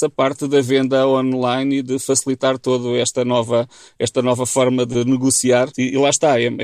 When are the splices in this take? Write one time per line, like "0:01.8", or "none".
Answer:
0:04.9

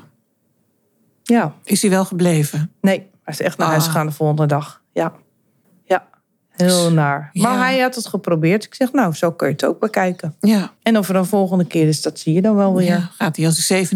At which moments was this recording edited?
0:10.8

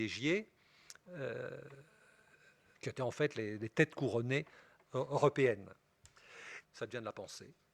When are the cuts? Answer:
0:02.7
0:06.6

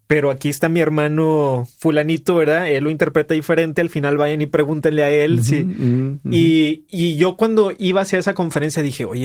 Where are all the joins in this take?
none

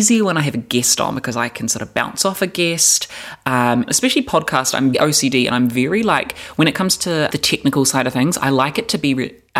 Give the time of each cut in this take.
0:03.9
0:04.9
0:07.3

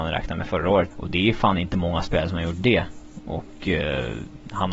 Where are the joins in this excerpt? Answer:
0:00.9

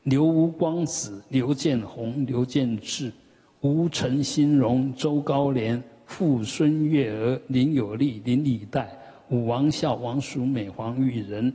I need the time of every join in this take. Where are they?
none

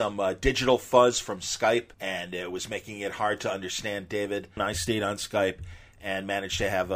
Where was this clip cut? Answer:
0:01.9
0:04.6

